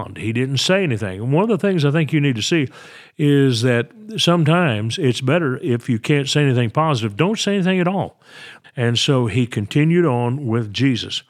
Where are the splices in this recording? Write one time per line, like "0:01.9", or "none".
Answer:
0:08.6